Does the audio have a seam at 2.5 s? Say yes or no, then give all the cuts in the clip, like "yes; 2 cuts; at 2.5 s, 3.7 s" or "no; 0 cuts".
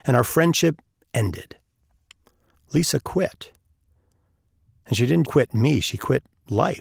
yes; 2 cuts; at 2.5 s, 5.2 s